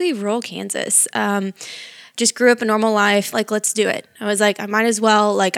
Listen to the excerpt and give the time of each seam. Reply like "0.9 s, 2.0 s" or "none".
3.3 s